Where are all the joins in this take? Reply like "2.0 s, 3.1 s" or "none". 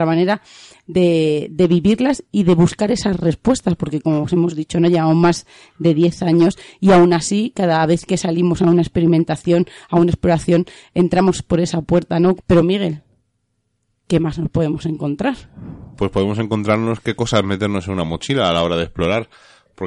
12.4 s